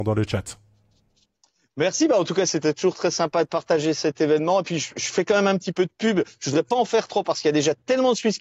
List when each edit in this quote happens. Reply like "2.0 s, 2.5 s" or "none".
none